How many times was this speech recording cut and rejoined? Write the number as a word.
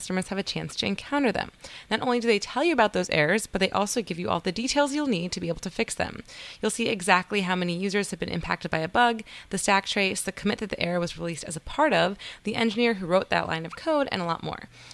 zero